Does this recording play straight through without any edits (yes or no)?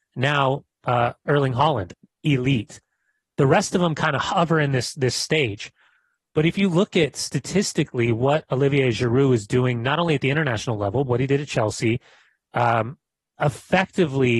no